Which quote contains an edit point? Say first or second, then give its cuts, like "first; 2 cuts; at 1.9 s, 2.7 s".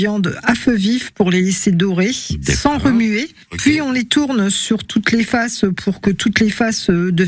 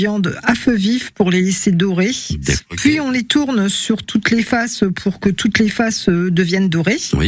second; 1 cut; at 2.6 s